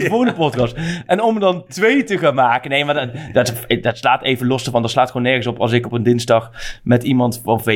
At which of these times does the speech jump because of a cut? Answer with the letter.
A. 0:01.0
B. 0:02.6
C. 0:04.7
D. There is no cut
D